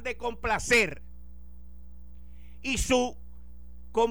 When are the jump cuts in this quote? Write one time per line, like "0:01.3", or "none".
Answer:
none